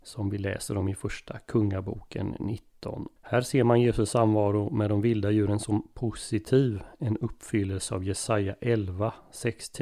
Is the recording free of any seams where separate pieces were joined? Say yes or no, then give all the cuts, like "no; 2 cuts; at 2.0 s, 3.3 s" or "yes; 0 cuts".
no; 1 cut; at 3.2 s